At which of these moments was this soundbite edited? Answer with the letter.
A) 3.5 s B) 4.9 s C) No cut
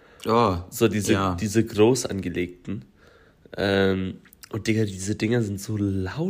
C